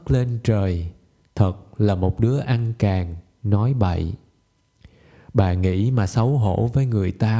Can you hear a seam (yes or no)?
no